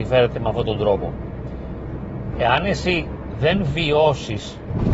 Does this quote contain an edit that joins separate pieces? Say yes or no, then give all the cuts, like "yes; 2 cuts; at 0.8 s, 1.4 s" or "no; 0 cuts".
yes; 1 cut; at 2.3 s